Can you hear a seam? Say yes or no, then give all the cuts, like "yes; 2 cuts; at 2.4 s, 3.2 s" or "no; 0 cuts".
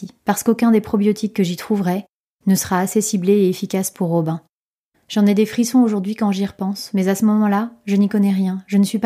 yes; 1 cut; at 4.9 s